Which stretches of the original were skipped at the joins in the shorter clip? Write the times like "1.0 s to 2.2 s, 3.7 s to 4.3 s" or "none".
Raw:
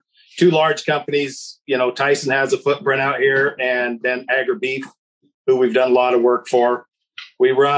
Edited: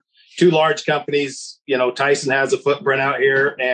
none

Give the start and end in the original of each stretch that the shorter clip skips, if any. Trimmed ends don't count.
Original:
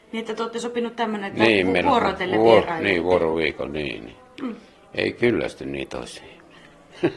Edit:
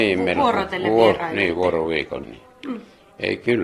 3.7 s to 4.0 s

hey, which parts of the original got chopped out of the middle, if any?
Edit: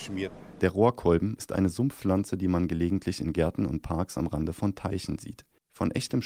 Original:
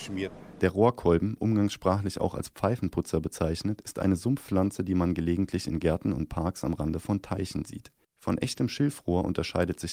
1.4 s to 3.8 s

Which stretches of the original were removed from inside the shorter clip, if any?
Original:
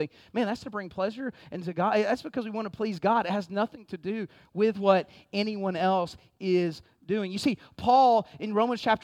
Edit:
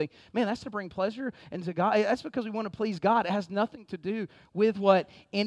none

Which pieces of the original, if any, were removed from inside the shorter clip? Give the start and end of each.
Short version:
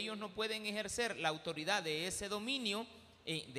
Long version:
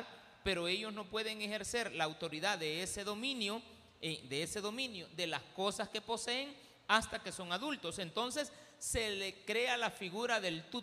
none

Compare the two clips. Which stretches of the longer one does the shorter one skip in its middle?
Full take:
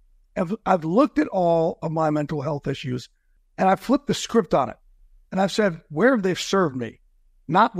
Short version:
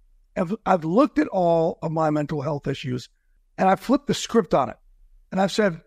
none

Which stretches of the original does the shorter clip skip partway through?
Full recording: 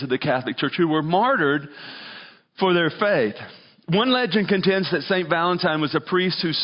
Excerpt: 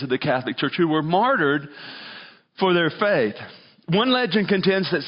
none

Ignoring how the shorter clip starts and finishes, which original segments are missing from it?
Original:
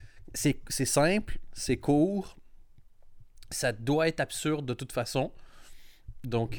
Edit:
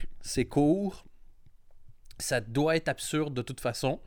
none

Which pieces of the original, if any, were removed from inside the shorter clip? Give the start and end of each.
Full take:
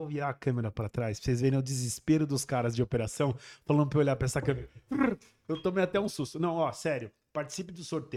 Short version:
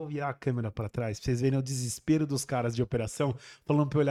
none

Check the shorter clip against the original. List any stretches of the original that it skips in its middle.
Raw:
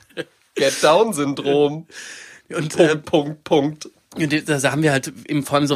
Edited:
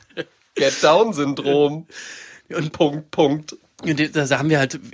2.7 s to 3.0 s

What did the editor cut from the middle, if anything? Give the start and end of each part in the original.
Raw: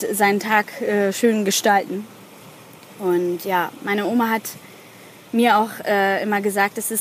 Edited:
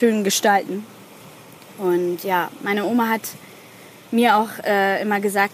none

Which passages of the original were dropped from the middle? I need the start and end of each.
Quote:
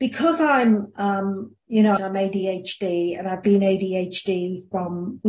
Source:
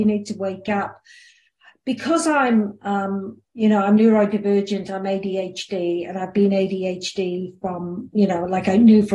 3.8 s to 4.9 s

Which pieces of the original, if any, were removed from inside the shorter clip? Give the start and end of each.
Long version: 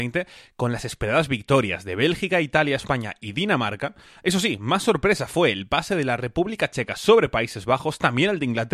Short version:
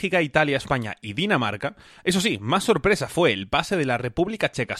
none

